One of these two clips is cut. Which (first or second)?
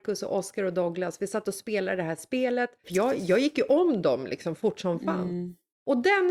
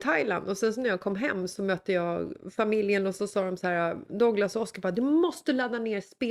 first